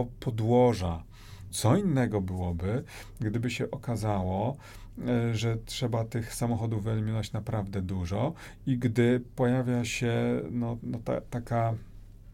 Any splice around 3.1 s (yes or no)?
no